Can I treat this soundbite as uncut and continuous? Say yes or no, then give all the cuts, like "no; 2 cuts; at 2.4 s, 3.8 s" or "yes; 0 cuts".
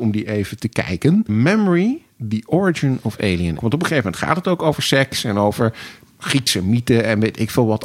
no; 2 cuts; at 1.3 s, 3.6 s